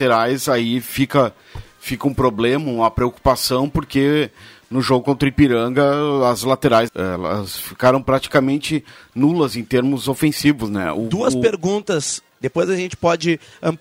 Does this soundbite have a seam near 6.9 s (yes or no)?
yes